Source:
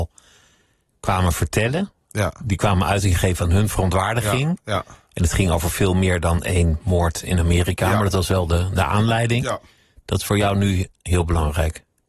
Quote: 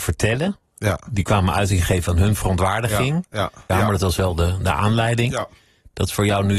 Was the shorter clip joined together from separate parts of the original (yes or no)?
yes